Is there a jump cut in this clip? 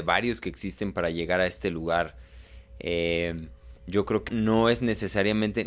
yes; 1 cut; at 4.3 s

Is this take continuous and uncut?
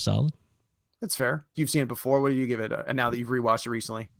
no; 1 cut; at 1.5 s

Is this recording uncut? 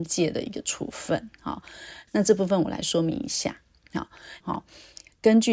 no; 2 cuts; at 2.1 s, 4.4 s

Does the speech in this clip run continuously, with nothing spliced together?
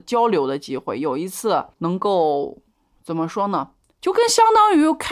no; 1 cut; at 1.7 s

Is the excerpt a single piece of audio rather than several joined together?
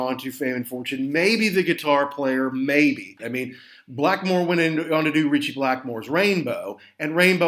no; 1 cut; at 3.2 s

